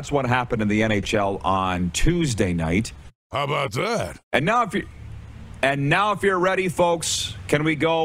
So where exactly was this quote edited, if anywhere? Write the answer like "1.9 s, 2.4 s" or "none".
none

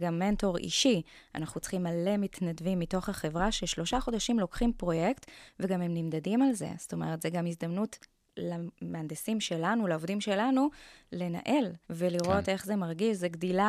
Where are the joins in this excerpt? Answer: 11.8 s

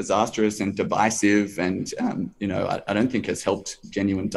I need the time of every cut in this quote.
none

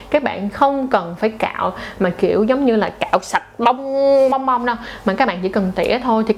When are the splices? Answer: 4.3 s

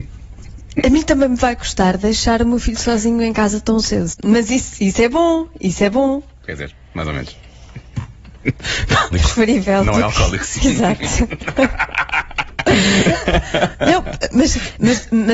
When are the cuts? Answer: 4.1 s, 9.1 s

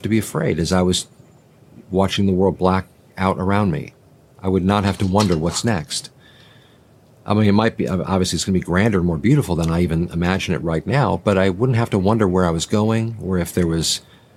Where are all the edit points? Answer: none

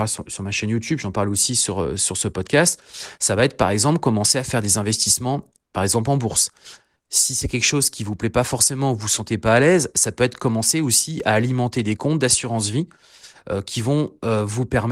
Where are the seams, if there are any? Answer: none

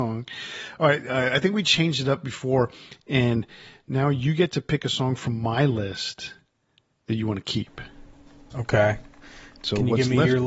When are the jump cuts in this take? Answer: none

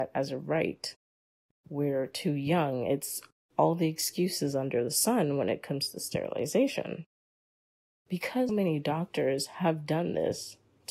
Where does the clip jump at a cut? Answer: 8.5 s

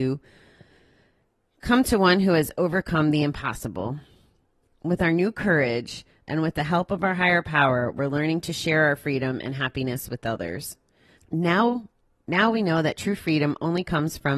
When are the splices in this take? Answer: 11.2 s

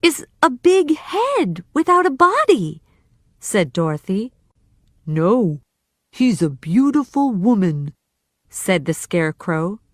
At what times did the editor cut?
none

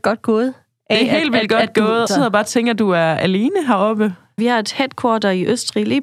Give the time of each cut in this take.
2.1 s, 4.4 s

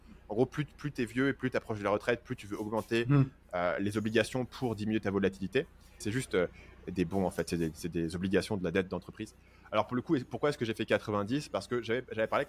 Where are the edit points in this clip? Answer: 6.0 s

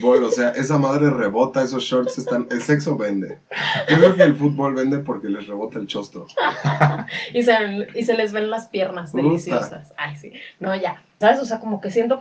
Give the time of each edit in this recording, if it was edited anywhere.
11.2 s

